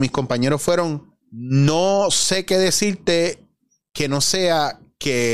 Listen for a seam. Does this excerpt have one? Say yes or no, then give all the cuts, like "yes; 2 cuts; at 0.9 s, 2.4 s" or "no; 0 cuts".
yes; 1 cut; at 1.2 s